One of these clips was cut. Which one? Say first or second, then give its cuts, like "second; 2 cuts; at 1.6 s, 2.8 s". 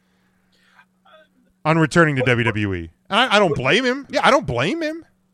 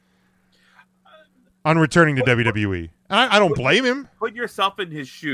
first; 1 cut; at 4.1 s